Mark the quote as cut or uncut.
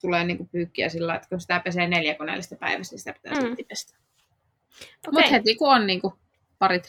uncut